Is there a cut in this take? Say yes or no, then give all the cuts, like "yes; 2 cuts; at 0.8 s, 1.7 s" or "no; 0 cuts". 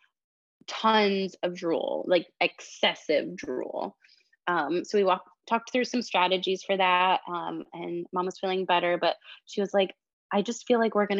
no; 0 cuts